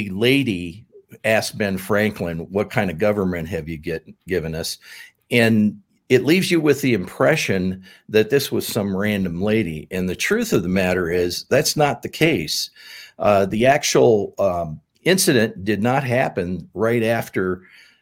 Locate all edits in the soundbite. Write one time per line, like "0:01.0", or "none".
none